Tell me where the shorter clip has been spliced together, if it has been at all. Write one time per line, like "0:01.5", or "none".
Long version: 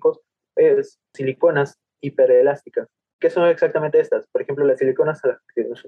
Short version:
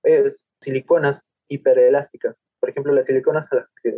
0:02.6